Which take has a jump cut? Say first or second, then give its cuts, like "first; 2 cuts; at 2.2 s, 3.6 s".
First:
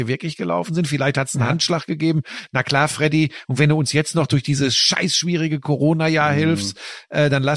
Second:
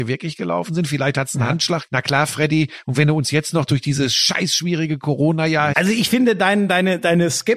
second; 2 cuts; at 1.9 s, 5.7 s